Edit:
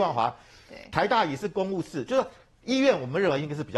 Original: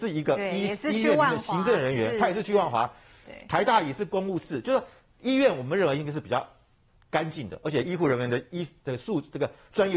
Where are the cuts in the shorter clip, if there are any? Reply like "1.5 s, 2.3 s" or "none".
none